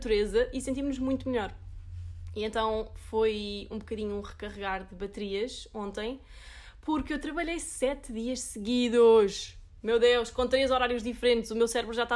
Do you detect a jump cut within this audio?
no; 0 cuts

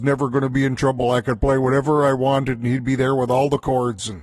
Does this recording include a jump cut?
no; 0 cuts

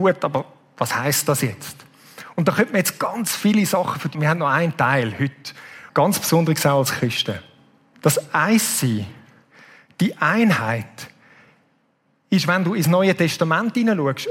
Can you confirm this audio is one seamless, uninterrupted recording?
no; 3 cuts; at 4.1 s, 5.9 s, 7.9 s

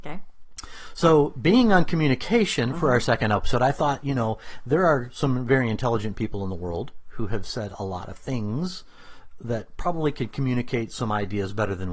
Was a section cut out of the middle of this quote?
no; 0 cuts

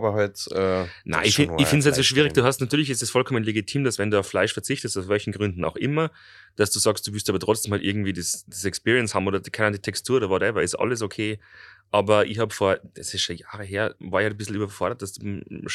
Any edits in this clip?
yes; 1 cut; at 14.0 s

